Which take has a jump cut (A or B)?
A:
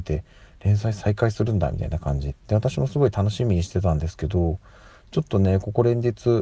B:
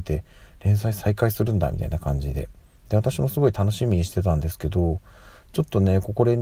A